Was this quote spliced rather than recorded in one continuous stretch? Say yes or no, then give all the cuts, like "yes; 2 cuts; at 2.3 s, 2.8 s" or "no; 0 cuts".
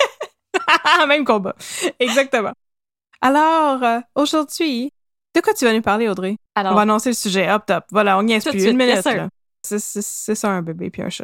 yes; 2 cuts; at 6.5 s, 9.6 s